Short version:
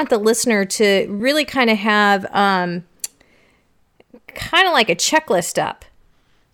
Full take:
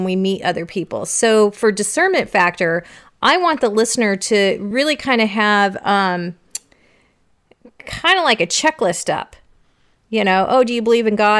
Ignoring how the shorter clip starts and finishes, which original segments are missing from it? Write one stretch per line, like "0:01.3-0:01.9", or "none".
none